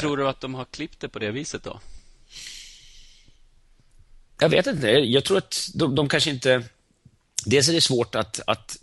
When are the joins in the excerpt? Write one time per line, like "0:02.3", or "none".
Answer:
none